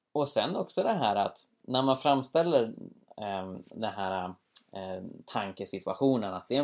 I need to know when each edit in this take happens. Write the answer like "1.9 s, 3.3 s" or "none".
none